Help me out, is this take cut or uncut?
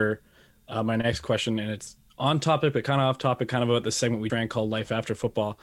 cut